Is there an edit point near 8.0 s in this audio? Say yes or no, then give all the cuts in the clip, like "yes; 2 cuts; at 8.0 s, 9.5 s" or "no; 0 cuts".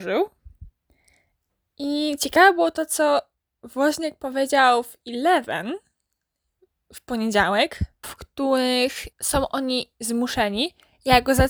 yes; 2 cuts; at 8.0 s, 9.1 s